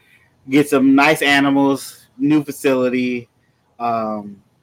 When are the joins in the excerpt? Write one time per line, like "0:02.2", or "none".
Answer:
none